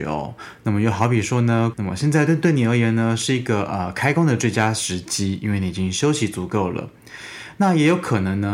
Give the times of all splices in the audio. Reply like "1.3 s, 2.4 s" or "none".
1.7 s

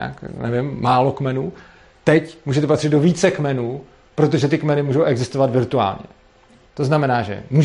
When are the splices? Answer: 6.7 s

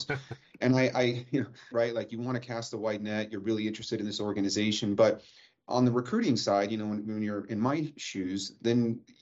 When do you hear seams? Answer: 1.7 s

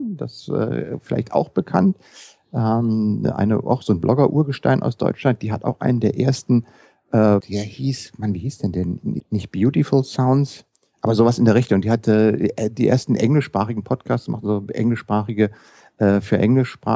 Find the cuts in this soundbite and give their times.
7.4 s, 9.2 s

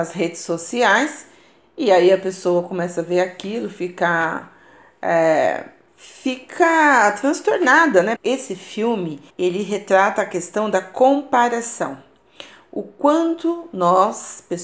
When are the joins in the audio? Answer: 8.2 s, 9.3 s

